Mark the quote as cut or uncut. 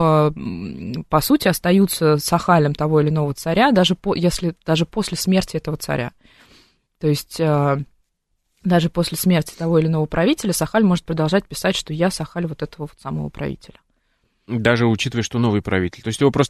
uncut